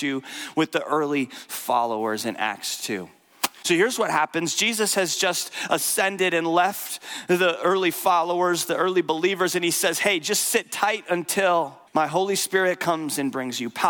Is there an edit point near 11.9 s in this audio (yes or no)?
yes